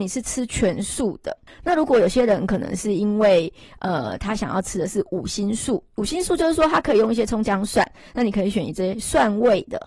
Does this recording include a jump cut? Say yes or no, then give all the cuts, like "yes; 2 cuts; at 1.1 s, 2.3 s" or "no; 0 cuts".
yes; 1 cut; at 1.5 s